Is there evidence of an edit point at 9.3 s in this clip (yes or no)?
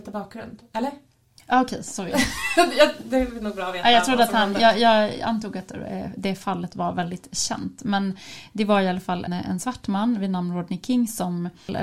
yes